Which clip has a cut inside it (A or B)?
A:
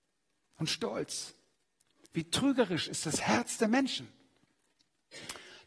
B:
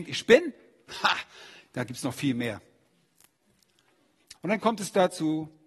B